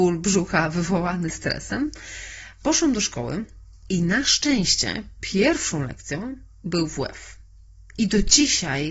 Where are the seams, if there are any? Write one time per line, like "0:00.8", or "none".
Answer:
0:07.9